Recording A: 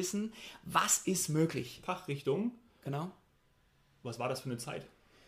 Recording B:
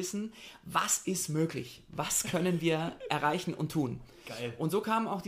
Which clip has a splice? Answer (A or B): A